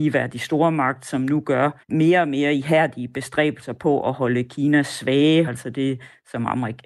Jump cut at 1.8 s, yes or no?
yes